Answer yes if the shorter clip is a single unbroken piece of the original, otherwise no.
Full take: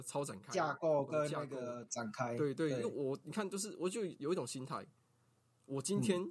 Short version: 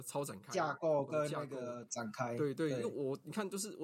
yes